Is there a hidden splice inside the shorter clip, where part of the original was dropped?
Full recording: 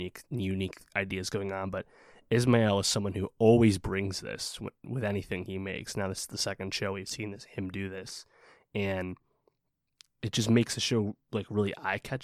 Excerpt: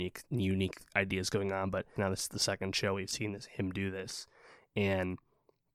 yes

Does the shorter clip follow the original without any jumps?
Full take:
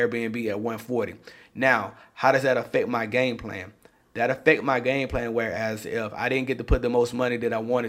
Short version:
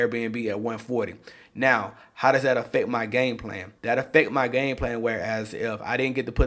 no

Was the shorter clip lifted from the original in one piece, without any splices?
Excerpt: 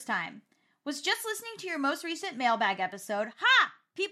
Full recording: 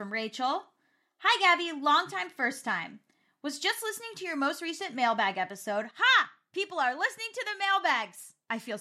yes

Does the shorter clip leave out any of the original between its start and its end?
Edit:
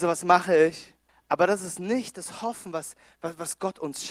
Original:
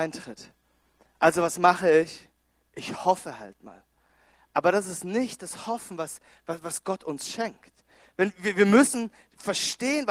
yes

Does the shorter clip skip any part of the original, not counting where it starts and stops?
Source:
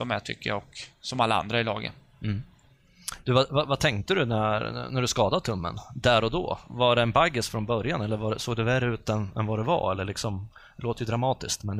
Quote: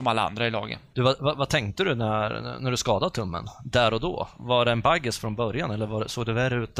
yes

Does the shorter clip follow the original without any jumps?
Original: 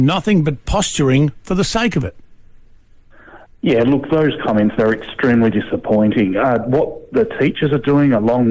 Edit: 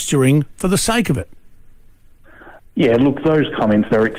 yes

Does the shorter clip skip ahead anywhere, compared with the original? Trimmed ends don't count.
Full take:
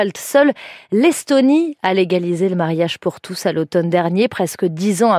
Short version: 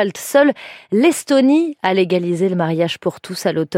no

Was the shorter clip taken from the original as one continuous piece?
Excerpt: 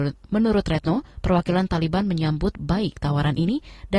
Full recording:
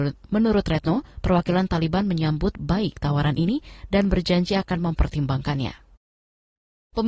yes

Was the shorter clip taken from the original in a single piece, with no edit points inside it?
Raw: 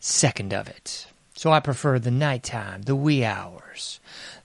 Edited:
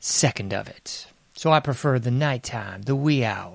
yes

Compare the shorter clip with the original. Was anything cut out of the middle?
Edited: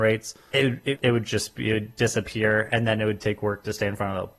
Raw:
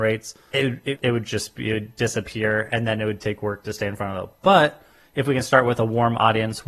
no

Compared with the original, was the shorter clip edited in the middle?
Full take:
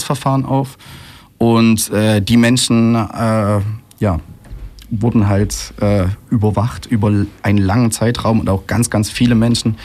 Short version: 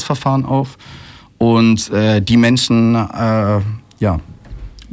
no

